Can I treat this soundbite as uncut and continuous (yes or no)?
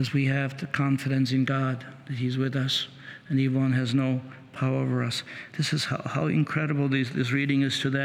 yes